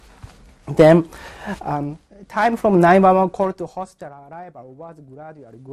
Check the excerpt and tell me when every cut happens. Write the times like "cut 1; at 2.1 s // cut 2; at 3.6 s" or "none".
none